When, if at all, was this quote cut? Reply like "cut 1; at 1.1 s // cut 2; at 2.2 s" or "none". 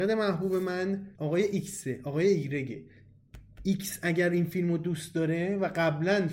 cut 1; at 1.1 s